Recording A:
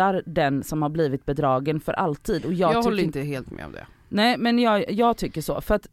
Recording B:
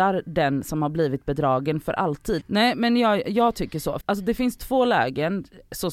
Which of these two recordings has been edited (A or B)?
B